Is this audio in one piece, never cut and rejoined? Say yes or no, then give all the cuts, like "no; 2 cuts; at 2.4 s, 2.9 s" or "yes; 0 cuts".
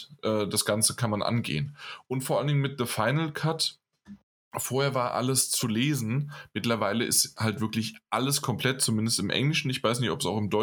yes; 0 cuts